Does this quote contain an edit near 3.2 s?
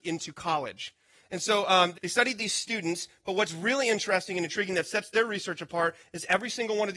no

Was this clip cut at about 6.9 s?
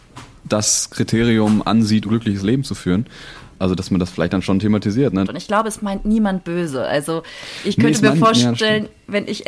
no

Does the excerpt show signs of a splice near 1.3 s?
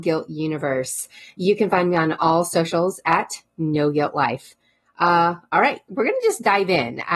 no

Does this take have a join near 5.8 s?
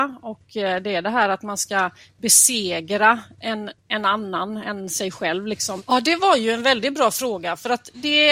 yes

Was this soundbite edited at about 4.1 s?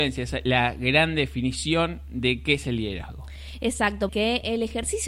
yes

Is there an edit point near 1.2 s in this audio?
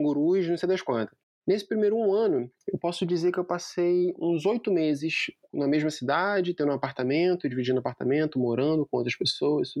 yes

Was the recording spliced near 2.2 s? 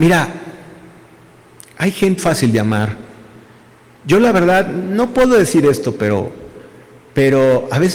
yes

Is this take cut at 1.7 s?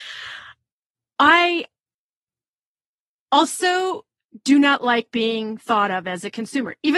no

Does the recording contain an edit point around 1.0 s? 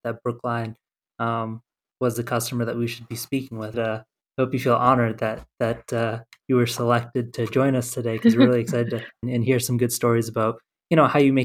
no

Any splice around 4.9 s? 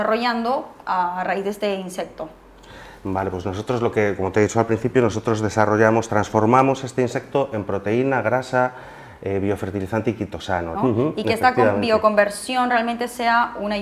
no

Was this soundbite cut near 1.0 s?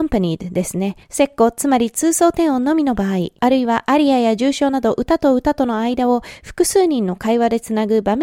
yes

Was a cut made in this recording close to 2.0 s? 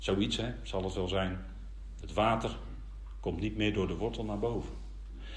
yes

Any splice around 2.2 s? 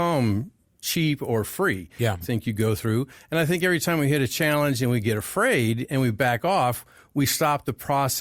yes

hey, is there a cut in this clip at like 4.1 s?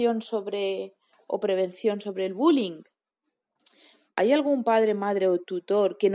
yes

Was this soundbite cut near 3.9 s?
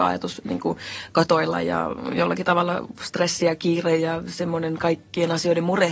no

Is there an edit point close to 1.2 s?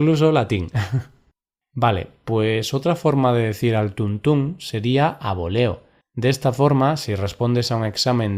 no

